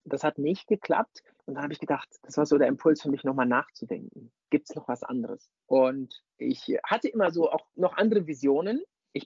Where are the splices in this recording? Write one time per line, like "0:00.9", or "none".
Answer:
none